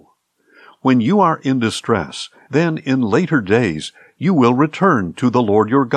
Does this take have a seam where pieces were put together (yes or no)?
yes